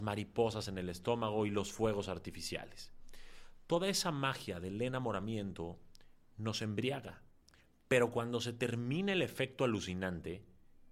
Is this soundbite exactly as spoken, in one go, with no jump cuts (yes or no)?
yes